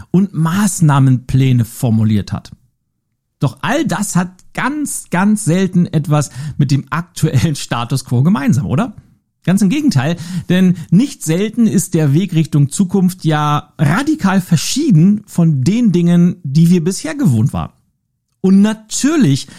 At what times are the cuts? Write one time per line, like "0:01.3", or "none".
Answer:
none

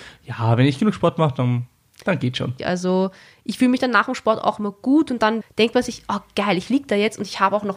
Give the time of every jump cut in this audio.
0:02.6
0:05.4

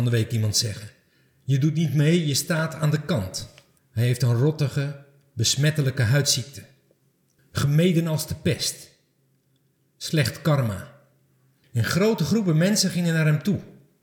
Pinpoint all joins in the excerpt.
0:03.8
0:07.4
0:11.6

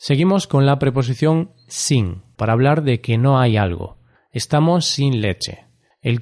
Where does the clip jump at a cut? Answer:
0:02.4

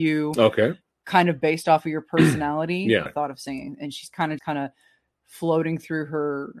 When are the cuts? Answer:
0:03.1
0:04.4

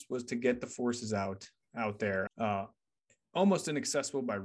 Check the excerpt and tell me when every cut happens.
0:02.3

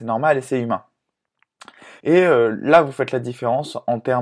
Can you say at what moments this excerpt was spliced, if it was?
0:02.0

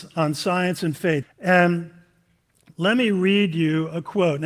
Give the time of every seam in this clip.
0:01.2

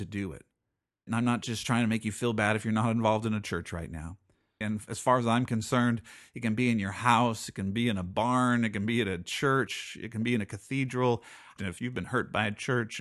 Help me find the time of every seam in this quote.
0:01.1
0:04.6
0:11.6

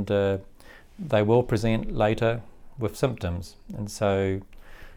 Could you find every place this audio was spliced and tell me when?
none

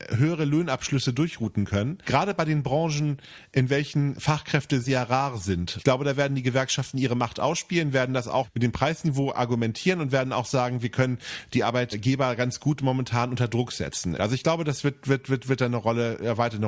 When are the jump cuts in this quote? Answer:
0:04.8
0:14.2

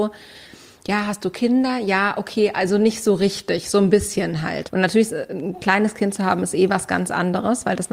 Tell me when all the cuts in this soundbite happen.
0:04.7

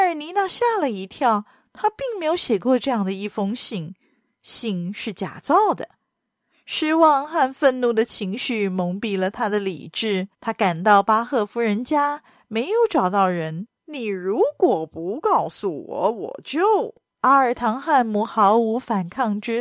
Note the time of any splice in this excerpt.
0:10.3
0:13.7

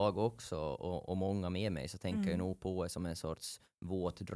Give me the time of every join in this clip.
none

